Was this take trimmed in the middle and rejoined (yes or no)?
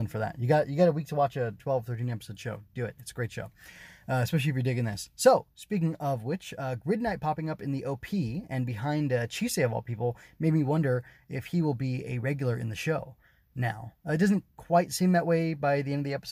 no